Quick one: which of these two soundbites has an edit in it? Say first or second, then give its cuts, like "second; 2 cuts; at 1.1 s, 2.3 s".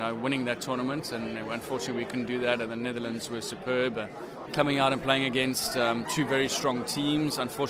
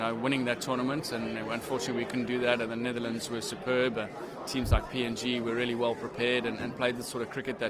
first; 1 cut; at 4.5 s